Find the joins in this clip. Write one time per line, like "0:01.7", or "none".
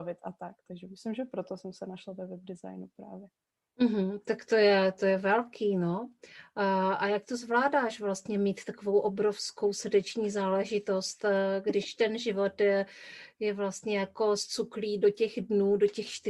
none